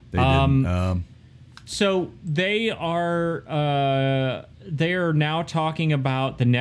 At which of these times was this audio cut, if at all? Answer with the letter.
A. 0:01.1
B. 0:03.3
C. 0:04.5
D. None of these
C